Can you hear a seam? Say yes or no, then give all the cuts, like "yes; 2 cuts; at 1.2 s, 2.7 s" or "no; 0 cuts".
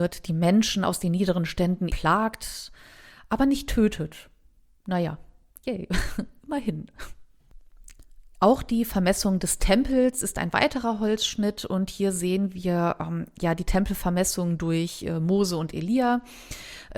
yes; 1 cut; at 1.9 s